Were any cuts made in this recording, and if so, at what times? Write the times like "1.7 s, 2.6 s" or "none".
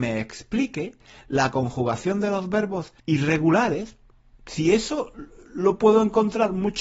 3.0 s